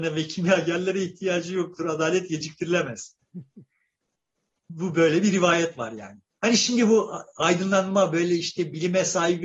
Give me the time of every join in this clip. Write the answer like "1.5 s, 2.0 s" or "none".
none

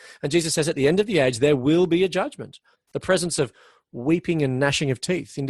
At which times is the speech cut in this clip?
2.7 s

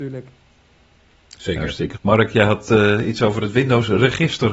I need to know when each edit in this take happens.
2.0 s

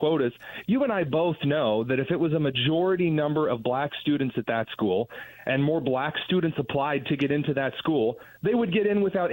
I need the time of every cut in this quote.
none

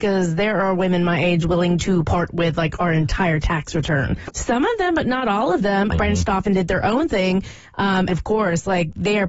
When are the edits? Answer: 4.3 s, 5.9 s, 8.1 s

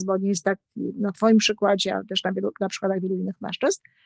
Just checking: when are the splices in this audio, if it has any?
none

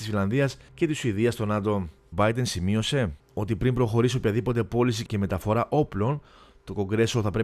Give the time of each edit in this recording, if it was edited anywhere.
2.1 s

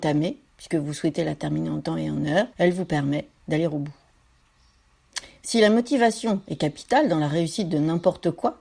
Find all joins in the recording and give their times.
2.5 s

